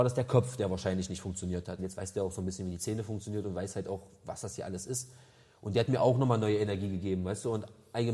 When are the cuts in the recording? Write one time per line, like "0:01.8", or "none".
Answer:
0:01.8